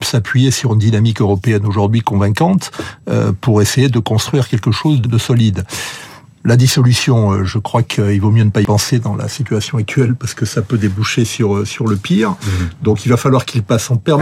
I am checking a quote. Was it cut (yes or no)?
yes